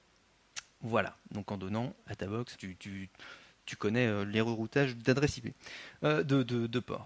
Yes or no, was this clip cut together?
yes